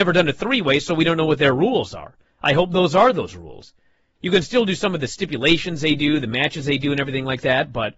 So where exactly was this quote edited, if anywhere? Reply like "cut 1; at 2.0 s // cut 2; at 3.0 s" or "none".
cut 1; at 4.1 s